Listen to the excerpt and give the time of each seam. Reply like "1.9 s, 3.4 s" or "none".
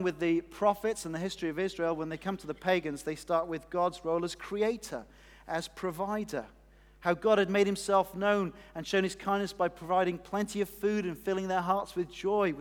none

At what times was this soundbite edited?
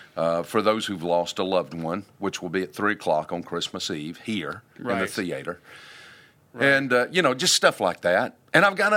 none

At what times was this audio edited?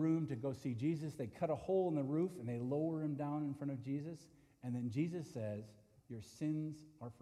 6.0 s

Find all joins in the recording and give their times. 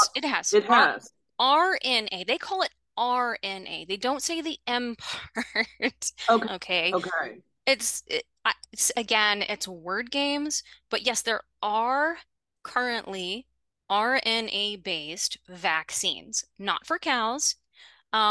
6.4 s

